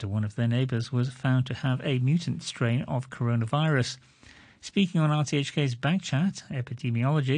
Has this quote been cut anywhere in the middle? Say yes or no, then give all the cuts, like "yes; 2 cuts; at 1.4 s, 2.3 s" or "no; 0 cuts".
yes; 1 cut; at 4.5 s